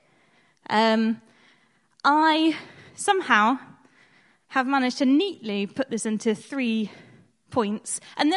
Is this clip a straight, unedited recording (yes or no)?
yes